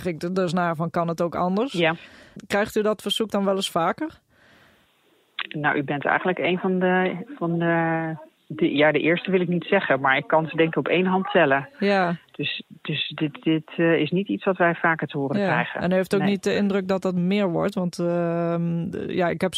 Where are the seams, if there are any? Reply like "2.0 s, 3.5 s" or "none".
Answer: none